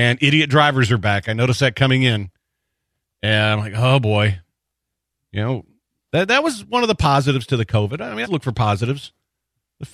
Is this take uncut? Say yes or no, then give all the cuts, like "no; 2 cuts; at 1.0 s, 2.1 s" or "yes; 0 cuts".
no; 1 cut; at 8.2 s